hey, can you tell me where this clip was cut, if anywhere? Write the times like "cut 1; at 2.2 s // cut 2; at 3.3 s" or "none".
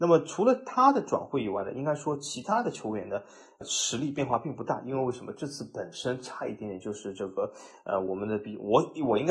none